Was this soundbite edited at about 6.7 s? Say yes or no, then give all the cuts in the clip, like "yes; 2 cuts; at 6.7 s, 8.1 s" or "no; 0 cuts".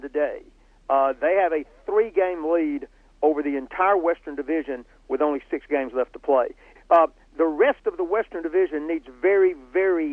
yes; 1 cut; at 6.7 s